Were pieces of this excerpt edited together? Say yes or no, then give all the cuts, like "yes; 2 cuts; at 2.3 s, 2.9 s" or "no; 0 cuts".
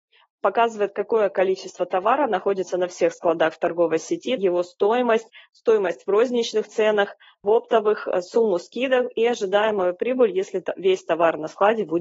yes; 1 cut; at 4.4 s